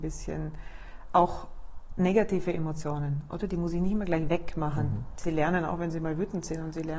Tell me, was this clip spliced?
yes; 1 cut; at 5.2 s

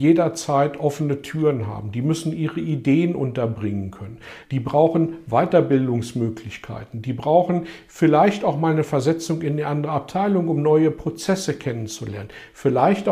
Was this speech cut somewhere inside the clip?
no; 0 cuts

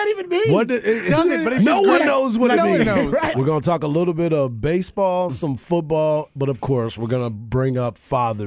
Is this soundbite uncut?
no; 1 cut; at 3.3 s

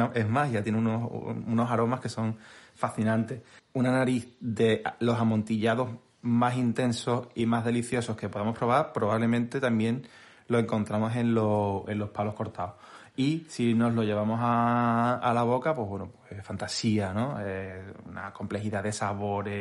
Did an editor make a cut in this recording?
no; 0 cuts

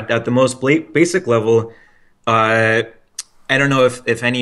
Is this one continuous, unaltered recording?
yes; 0 cuts

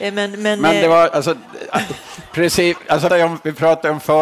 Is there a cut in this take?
yes; 1 cut; at 3.1 s

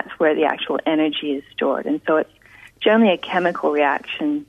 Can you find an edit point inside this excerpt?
no; 0 cuts

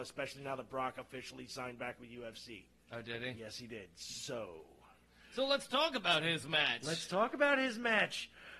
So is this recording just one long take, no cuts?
yes; 0 cuts

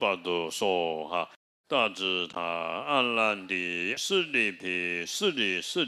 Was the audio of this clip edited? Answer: yes; 2 cuts; at 1.5 s, 4.0 s

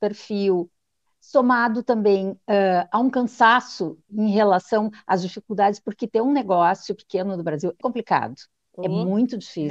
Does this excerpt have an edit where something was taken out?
yes; 2 cuts; at 4.1 s, 7.8 s

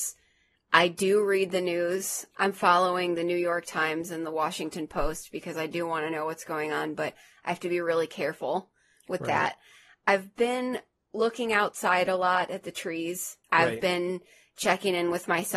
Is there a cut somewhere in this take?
yes; 1 cut; at 13.4 s

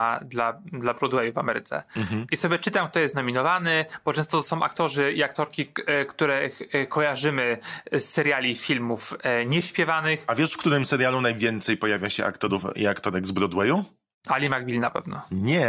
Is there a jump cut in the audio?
no; 0 cuts

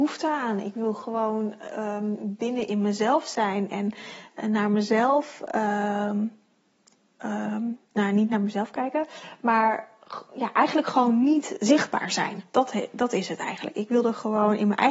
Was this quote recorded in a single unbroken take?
yes; 0 cuts

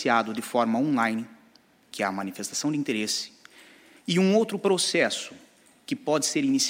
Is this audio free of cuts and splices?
yes; 0 cuts

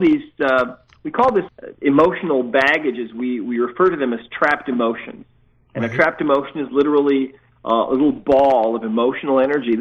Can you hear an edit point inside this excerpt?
no; 0 cuts

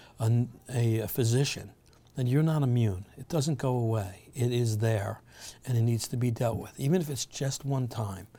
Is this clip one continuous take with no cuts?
yes; 0 cuts

